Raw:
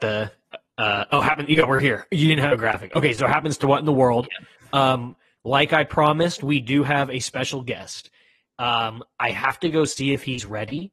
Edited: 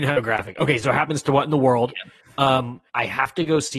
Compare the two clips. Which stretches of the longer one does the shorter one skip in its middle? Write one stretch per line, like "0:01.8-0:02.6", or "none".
0:05.2-0:09.1